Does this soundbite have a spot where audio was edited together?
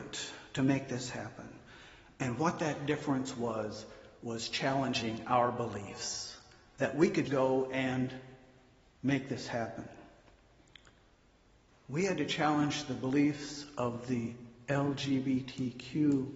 yes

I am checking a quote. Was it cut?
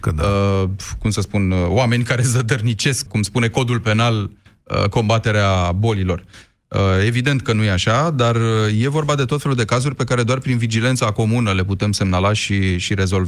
yes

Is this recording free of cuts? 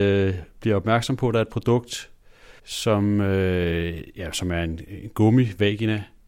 no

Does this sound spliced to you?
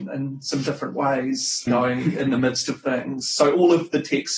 yes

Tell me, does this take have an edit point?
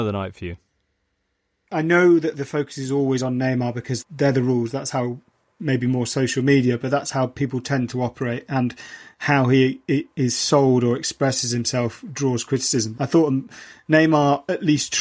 yes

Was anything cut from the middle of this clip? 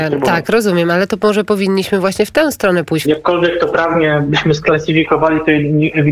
yes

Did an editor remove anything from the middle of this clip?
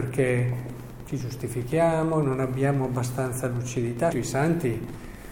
yes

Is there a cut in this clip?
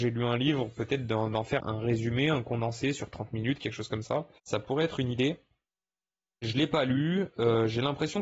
yes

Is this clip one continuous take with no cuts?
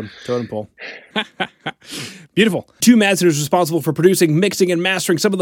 no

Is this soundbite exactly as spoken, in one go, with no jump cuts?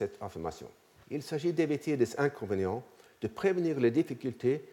no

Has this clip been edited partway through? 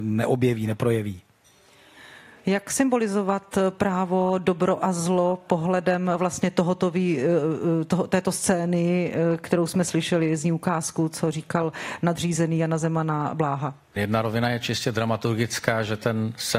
yes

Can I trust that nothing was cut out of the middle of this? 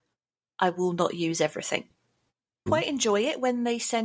no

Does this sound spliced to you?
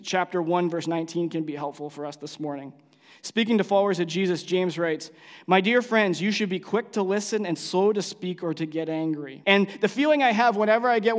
yes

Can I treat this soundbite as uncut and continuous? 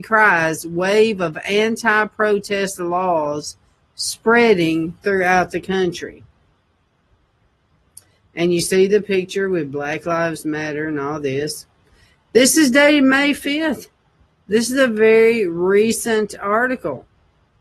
yes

